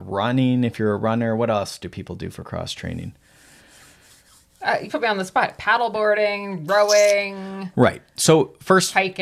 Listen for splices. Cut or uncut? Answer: cut